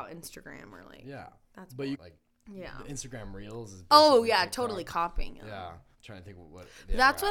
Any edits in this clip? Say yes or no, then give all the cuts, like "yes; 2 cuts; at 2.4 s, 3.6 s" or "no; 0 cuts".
yes; 2 cuts; at 1.9 s, 5.9 s